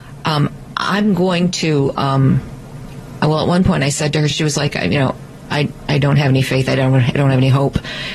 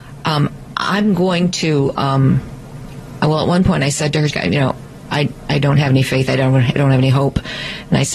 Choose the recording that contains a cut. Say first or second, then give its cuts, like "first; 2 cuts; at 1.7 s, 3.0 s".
second; 1 cut; at 4.3 s